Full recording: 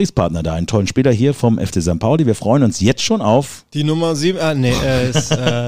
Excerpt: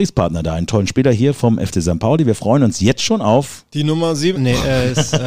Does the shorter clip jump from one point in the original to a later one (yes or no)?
yes